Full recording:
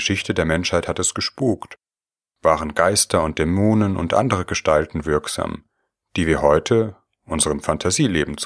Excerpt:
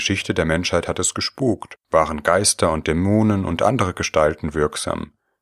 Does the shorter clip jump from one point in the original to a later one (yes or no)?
yes